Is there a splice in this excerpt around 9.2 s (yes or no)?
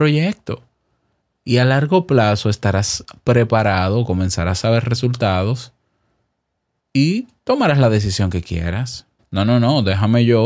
yes